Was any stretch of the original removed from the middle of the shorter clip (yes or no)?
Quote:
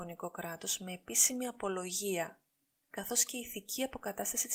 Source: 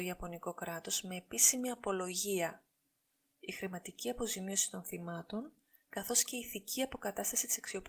yes